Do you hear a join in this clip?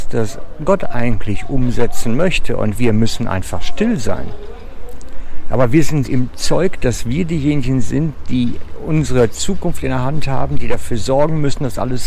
yes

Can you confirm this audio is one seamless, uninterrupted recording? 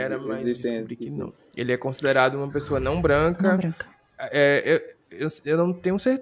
yes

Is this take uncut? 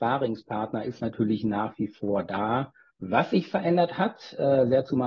no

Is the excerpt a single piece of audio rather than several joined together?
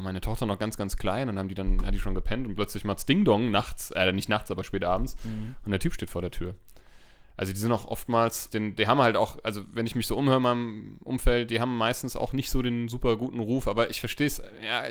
no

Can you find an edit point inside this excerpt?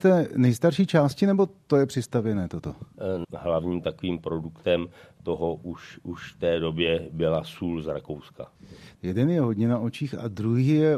yes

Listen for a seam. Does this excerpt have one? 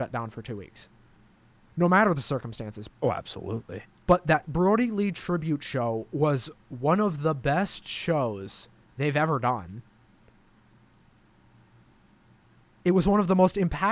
yes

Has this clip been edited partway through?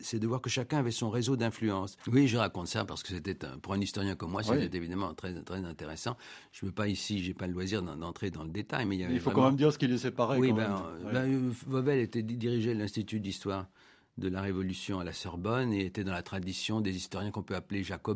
yes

